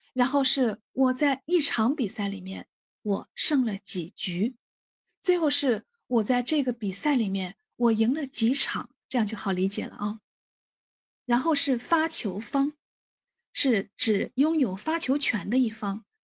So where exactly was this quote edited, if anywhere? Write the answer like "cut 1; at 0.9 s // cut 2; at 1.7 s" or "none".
cut 1; at 9.0 s